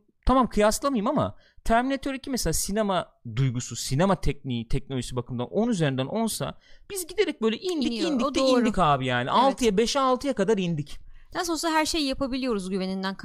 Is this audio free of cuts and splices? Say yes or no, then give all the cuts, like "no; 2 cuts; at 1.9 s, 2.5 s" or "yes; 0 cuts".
yes; 0 cuts